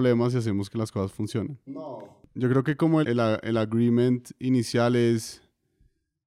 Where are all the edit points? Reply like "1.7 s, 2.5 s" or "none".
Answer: 1.7 s, 3.0 s